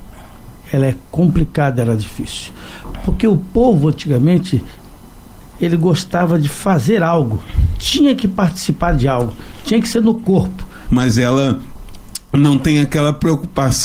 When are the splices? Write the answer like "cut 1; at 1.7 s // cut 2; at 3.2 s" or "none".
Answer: cut 1; at 5.5 s // cut 2; at 10.9 s